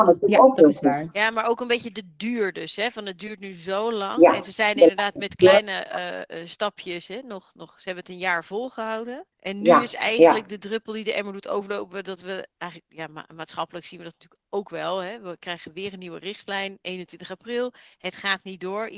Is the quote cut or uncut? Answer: cut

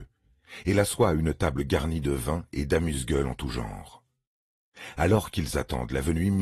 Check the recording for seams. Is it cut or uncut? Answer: uncut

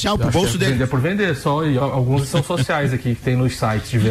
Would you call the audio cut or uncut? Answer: cut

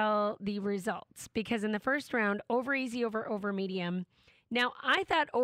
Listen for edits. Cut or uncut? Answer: uncut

